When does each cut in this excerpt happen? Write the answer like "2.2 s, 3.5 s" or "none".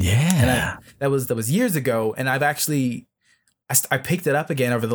none